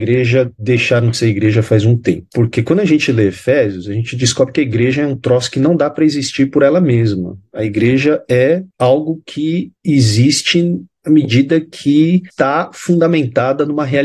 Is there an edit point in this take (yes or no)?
no